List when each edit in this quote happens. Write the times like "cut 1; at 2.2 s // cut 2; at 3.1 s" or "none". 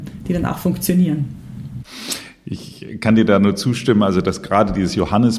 none